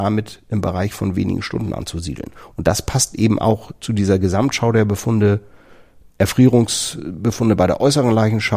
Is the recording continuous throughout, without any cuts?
yes; 0 cuts

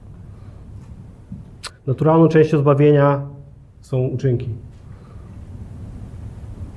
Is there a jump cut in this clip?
yes; 1 cut; at 1.7 s

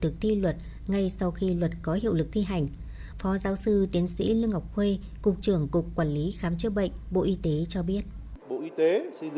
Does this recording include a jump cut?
yes; 1 cut; at 3.1 s

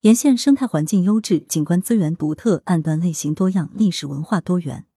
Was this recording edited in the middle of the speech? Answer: yes; 1 cut; at 1.5 s

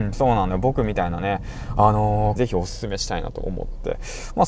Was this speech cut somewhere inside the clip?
yes; 1 cut; at 2.4 s

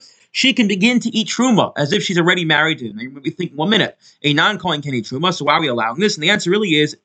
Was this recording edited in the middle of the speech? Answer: no; 0 cuts

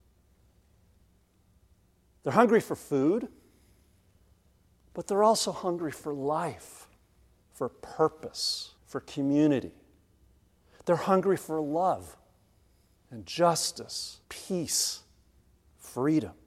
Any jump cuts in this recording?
yes; 3 cuts; at 7.4 s, 8.7 s, 14.2 s

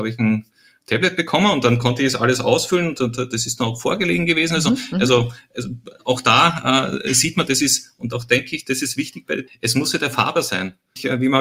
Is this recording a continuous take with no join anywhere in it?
no; 1 cut; at 9.5 s

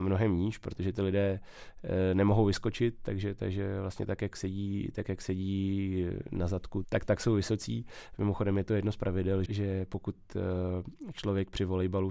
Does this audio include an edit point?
yes; 2 cuts; at 6.8 s, 9.5 s

